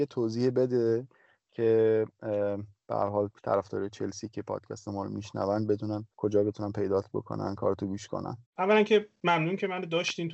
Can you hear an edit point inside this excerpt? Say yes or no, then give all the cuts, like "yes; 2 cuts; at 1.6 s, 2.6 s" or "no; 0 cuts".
yes; 1 cut; at 8.5 s